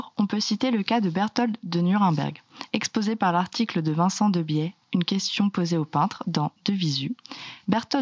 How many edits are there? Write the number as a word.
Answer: zero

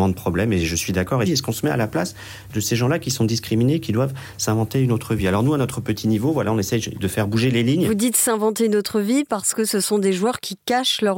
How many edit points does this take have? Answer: one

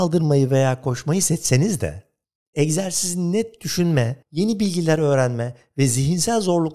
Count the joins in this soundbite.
one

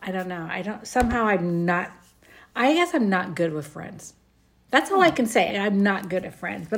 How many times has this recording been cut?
one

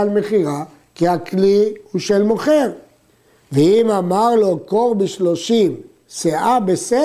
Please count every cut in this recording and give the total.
zero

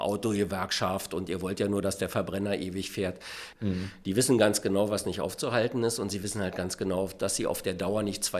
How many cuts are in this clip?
one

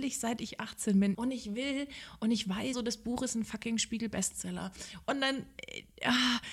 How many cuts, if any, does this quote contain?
three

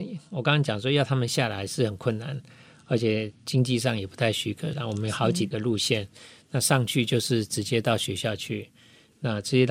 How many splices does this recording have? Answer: one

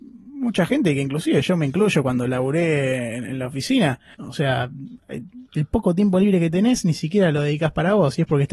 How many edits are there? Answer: two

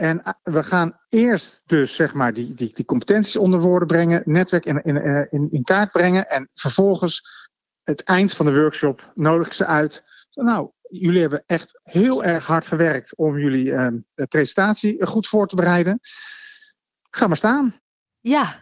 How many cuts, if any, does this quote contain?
zero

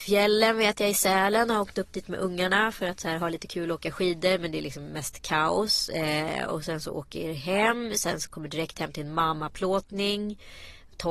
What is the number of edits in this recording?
zero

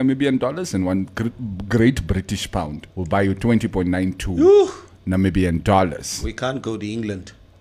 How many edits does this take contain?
one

